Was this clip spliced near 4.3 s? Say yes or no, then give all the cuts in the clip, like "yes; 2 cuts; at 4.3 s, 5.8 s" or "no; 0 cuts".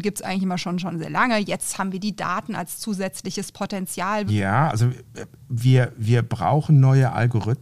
yes; 1 cut; at 4.3 s